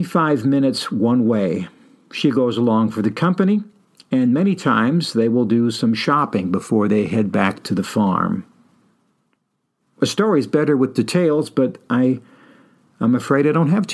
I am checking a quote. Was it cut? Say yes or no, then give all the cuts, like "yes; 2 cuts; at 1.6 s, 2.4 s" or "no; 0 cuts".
no; 0 cuts